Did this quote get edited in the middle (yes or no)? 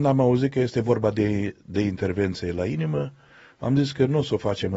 no